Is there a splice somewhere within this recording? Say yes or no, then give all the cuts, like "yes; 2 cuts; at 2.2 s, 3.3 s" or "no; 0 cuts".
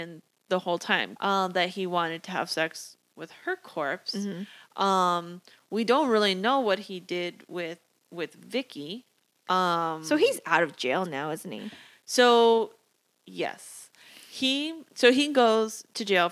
no; 0 cuts